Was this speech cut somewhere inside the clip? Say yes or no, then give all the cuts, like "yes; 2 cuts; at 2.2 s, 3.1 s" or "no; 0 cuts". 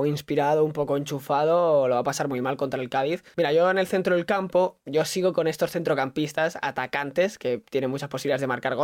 yes; 1 cut; at 3.3 s